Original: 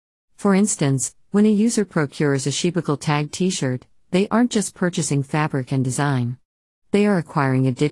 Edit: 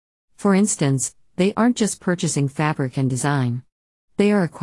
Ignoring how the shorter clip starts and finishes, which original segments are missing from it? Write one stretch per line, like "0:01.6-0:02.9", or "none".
0:01.3-0:04.0